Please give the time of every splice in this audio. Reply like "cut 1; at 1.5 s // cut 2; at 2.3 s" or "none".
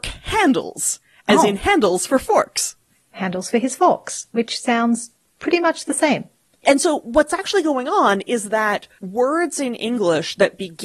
cut 1; at 6.6 s